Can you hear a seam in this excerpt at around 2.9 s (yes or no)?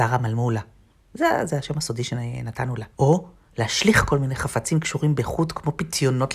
yes